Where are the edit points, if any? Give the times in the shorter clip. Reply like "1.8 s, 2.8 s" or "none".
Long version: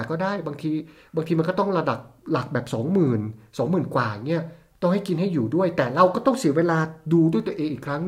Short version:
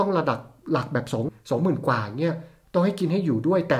1.3 s